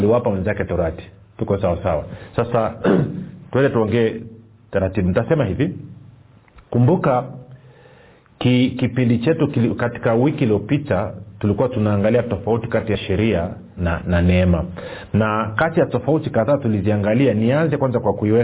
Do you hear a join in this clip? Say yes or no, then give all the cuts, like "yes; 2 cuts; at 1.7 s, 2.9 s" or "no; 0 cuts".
yes; 1 cut; at 13.8 s